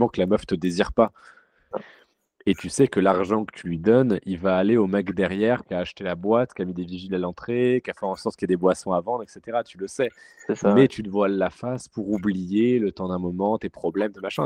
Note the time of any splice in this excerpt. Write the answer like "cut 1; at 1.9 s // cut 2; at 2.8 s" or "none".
cut 1; at 1.7 s